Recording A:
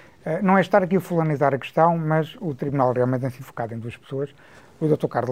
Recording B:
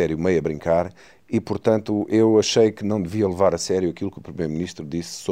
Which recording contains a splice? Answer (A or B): A